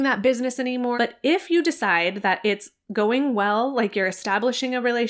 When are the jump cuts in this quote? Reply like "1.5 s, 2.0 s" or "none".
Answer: 1.0 s